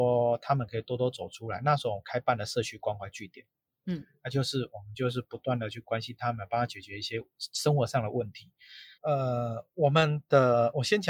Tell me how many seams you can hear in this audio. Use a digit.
1